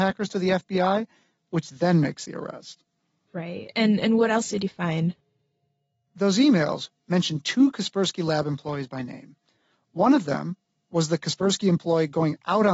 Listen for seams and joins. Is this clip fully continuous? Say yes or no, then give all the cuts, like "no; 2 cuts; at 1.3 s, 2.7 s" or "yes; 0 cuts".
no; 1 cut; at 6.9 s